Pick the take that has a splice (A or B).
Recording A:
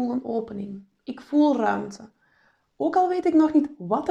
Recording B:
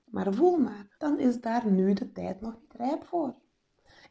B